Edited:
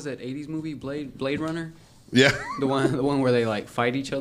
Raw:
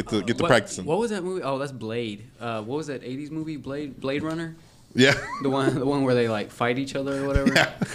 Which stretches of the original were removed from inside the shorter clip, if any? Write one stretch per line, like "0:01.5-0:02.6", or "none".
none